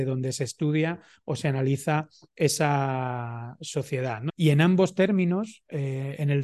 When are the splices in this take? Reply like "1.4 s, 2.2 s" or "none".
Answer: 4.3 s